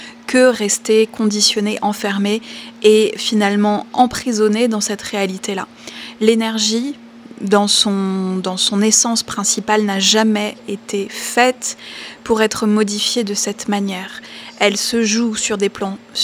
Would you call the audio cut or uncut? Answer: uncut